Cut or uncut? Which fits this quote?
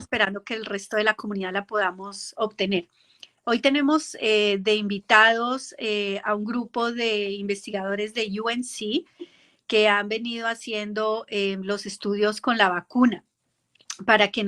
uncut